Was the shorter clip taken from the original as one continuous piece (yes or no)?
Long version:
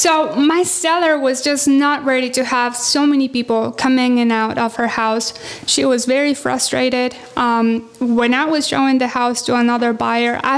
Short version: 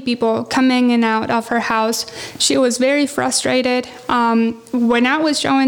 yes